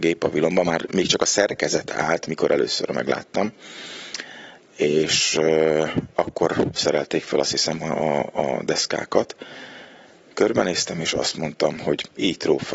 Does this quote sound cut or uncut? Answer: uncut